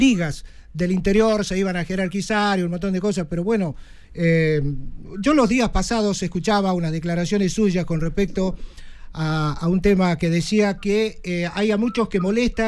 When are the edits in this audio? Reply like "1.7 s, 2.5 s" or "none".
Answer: 4.0 s